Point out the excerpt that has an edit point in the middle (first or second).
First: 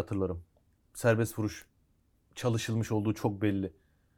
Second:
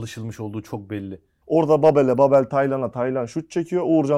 second